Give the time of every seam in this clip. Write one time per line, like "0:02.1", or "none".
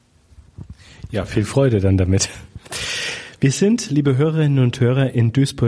none

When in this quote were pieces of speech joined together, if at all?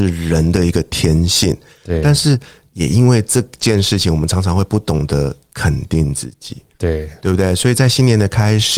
none

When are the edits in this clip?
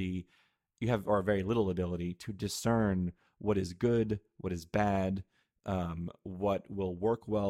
none

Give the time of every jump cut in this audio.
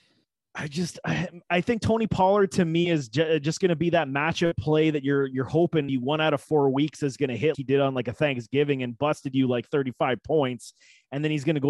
0:05.9
0:07.5

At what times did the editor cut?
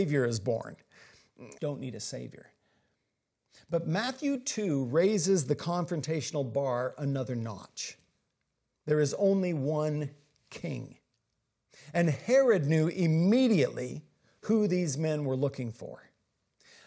0:01.6

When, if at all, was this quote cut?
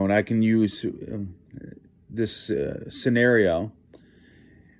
none

